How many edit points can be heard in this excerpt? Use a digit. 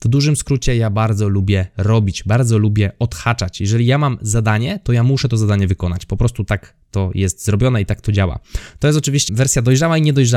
1